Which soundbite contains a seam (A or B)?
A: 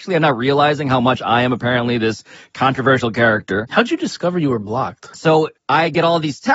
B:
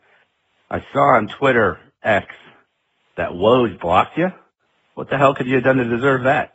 A